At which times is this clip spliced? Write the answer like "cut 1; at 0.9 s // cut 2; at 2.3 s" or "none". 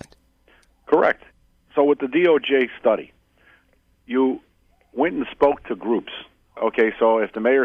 cut 1; at 6.6 s

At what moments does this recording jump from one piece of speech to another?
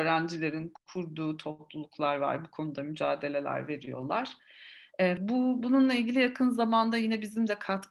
cut 1; at 5.2 s

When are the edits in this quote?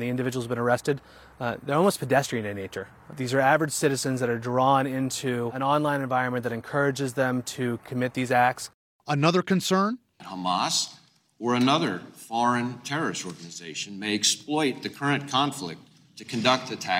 none

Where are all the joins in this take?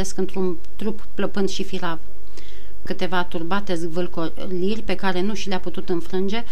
cut 1; at 2.9 s

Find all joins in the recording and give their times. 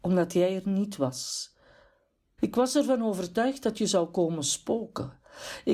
cut 1; at 2.4 s

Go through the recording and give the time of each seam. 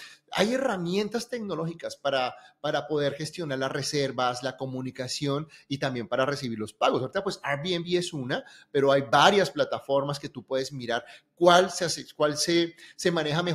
none

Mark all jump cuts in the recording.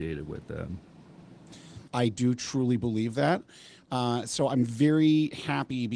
cut 1; at 1.9 s // cut 2; at 3.8 s

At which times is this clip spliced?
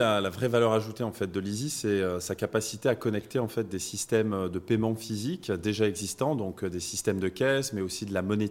none

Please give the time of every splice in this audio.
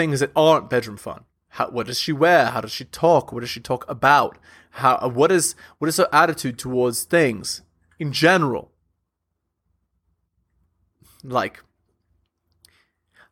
none

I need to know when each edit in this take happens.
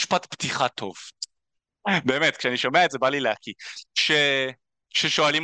cut 1; at 1.4 s // cut 2; at 3.9 s

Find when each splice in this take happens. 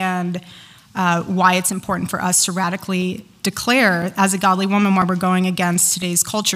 none

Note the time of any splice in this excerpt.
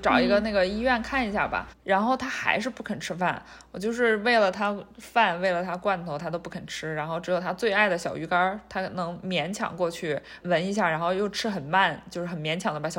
cut 1; at 1.7 s // cut 2; at 10.4 s

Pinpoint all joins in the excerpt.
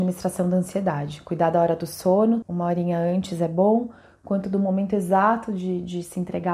cut 1; at 2.4 s

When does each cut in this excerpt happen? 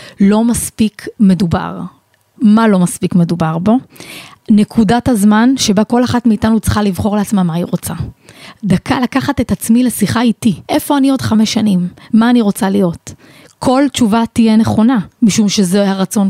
cut 1; at 10.6 s

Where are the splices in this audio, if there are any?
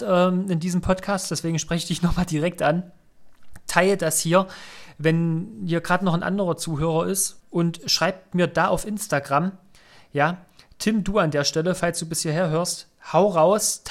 cut 1; at 7.4 s

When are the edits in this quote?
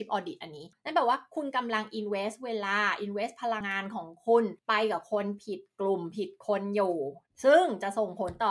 cut 1; at 3.6 s

